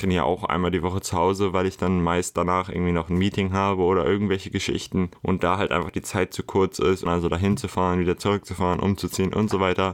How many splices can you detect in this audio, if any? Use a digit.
1